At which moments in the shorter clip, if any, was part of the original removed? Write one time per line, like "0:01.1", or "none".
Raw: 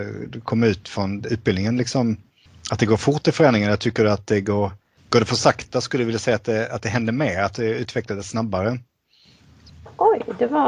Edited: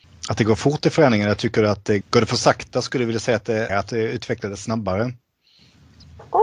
0:02.0
0:03.7